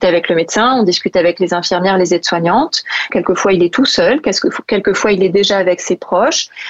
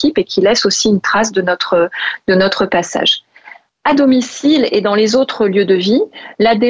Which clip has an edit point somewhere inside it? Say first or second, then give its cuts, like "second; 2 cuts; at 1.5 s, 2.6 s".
first; 1 cut; at 3.1 s